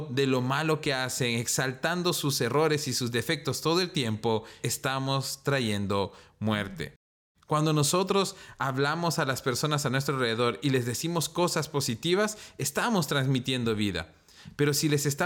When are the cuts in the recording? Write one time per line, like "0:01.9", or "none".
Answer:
0:04.6
0:07.3